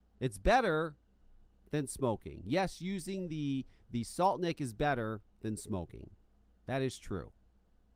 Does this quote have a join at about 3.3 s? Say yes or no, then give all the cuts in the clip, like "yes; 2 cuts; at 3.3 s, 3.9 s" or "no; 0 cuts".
no; 0 cuts